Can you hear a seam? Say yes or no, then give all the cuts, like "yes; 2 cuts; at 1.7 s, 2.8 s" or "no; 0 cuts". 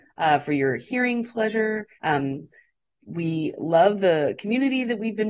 yes; 1 cut; at 1.9 s